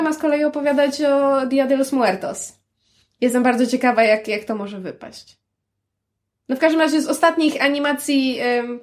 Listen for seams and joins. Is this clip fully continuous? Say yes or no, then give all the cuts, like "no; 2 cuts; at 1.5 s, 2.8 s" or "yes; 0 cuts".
yes; 0 cuts